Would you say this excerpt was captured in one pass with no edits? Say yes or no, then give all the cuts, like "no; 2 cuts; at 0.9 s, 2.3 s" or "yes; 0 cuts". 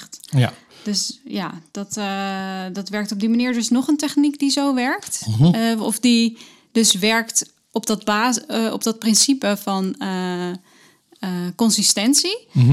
yes; 0 cuts